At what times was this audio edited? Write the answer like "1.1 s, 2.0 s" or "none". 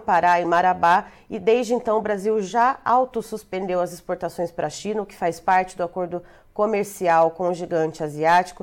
none